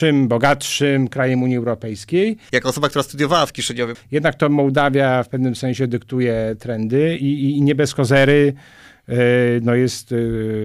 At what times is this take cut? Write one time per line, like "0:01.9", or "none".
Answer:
0:02.5
0:03.9